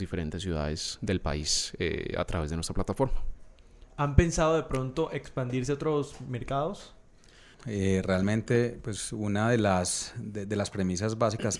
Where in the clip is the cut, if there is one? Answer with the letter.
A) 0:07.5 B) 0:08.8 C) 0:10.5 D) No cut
A